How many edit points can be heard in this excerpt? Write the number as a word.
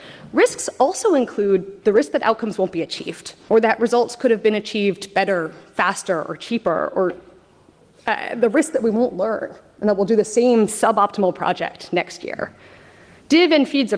one